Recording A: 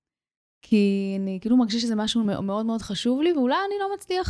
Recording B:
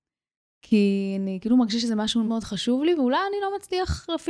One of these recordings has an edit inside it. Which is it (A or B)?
B